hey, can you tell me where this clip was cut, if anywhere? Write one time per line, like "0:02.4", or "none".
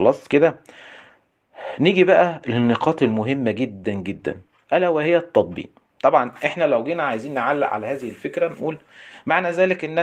0:03.8